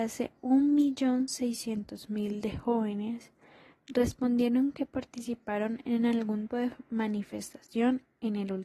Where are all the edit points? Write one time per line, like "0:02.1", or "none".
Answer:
0:06.5

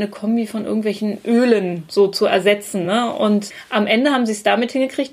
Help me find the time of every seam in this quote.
none

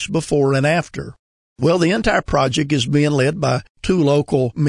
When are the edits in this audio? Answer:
0:01.4

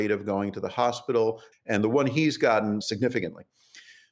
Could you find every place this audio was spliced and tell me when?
0:01.5
0:02.8

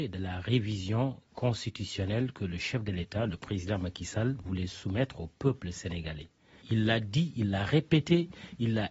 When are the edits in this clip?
0:06.6

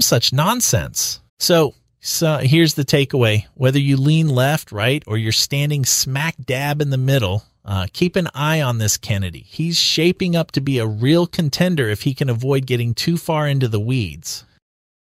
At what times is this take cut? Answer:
0:01.3

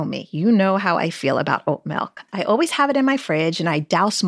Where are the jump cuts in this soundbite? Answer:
0:02.3

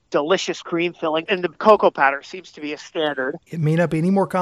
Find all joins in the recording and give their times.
0:01.3
0:03.5

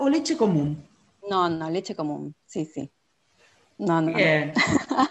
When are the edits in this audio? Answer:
none

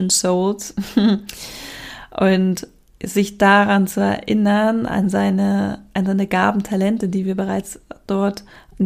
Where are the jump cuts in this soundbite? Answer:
none

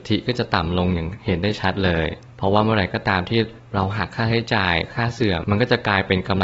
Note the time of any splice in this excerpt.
0:05.4

